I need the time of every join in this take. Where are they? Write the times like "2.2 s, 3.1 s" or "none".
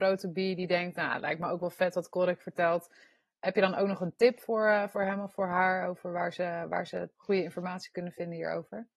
none